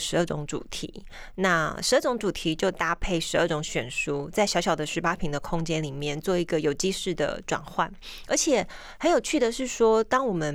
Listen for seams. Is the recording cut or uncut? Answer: uncut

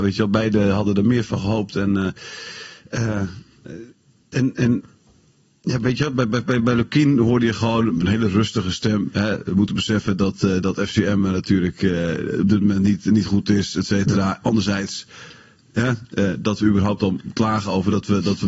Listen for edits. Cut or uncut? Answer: uncut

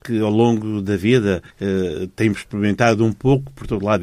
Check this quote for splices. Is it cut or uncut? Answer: cut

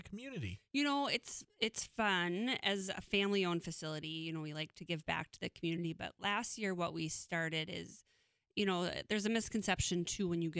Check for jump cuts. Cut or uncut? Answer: uncut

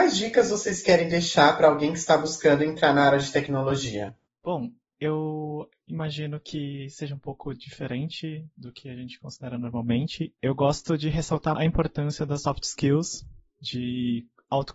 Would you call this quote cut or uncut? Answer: cut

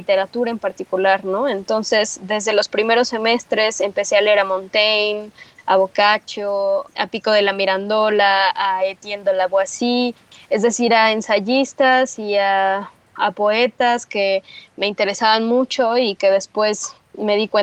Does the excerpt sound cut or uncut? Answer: uncut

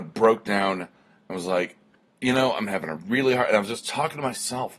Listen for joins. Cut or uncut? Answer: uncut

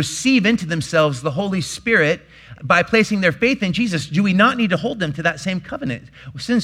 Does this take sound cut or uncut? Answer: cut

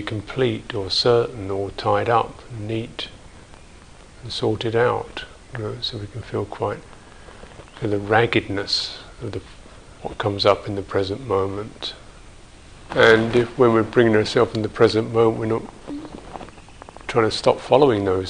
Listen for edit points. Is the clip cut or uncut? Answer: cut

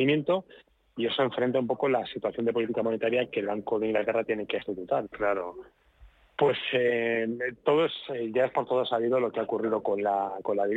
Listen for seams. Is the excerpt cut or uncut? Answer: cut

